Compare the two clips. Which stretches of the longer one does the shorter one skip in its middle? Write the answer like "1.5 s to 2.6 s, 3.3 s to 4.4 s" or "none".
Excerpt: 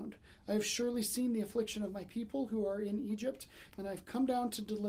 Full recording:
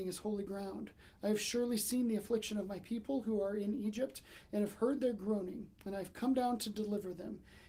4.4 s to 5.8 s